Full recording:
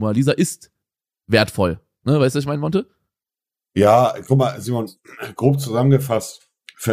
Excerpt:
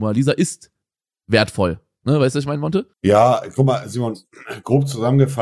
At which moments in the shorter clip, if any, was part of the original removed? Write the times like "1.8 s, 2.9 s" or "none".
2.9 s